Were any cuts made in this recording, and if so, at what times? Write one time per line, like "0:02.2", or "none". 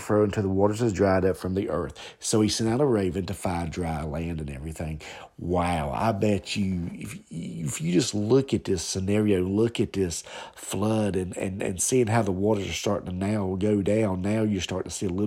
none